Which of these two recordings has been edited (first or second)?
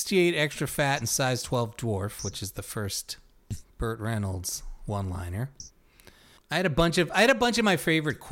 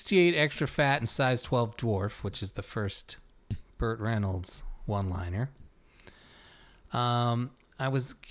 first